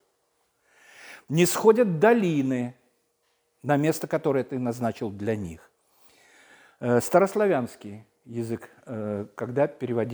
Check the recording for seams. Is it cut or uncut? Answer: uncut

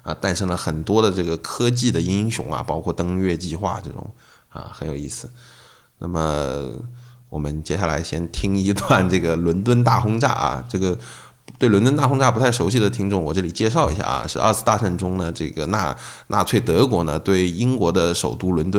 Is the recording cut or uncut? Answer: uncut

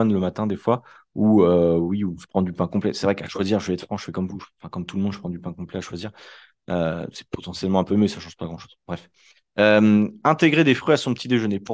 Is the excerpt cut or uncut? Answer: uncut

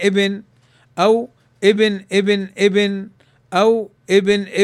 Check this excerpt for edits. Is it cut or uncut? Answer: uncut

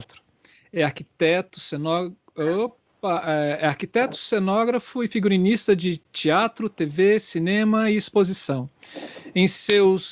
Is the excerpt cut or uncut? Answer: uncut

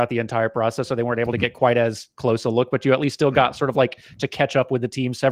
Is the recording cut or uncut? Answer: uncut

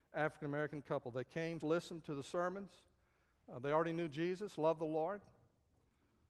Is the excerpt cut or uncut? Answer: cut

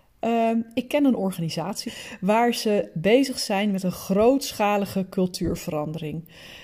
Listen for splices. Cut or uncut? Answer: cut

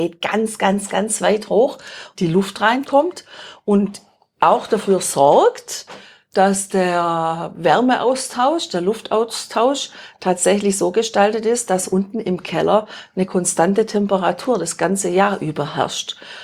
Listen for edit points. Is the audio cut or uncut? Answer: cut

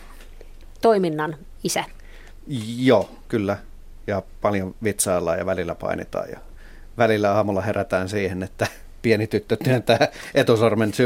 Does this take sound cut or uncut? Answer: uncut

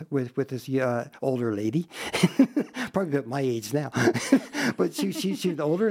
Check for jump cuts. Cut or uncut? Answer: uncut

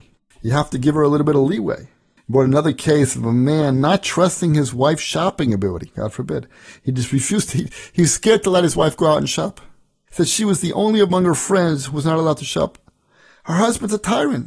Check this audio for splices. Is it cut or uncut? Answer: cut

